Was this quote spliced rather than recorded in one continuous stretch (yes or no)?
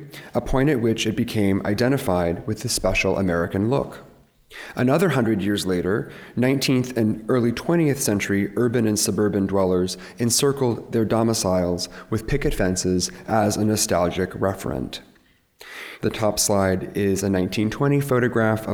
yes